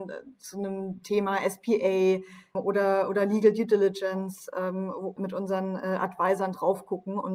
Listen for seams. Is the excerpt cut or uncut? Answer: cut